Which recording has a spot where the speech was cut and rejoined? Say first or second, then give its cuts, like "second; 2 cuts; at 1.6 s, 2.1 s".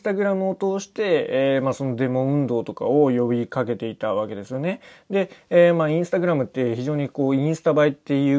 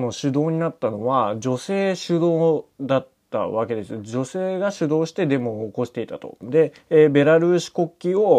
second; 1 cut; at 6.4 s